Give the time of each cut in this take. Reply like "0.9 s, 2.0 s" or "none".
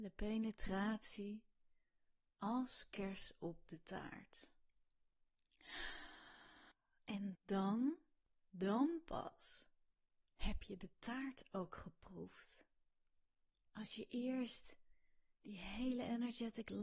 7.4 s